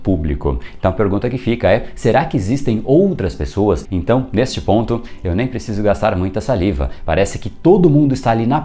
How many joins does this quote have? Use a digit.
1